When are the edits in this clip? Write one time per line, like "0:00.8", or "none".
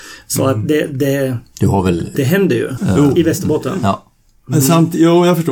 0:02.8

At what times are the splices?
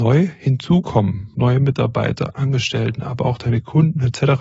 0:01.3

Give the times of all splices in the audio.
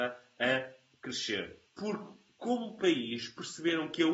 0:01.7

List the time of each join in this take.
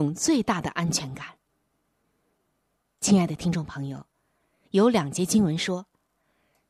0:04.6

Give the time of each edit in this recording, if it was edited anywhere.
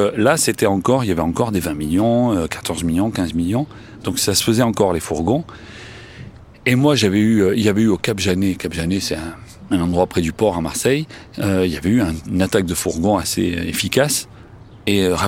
none

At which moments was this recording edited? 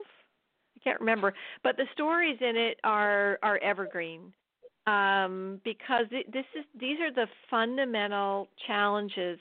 none

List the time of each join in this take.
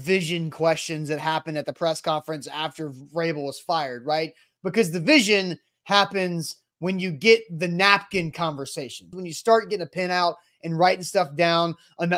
0:09.1

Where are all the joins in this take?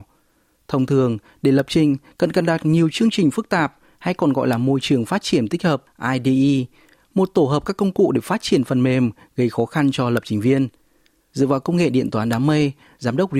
none

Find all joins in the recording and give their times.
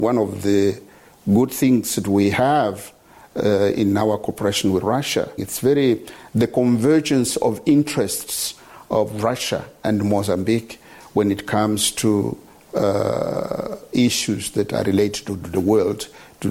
0:05.4

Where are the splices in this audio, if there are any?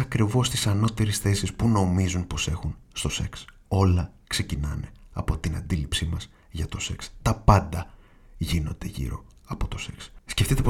0:02.8

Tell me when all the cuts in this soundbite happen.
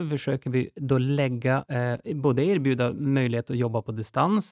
none

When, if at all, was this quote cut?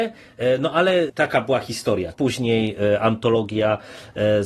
0:01.1
0:02.1

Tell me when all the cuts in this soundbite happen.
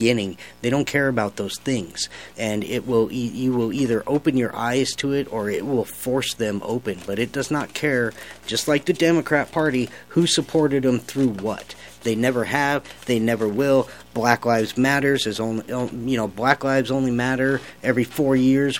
0:02.3

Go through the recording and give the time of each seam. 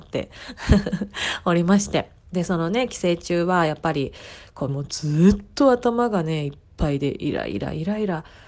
0:04.7

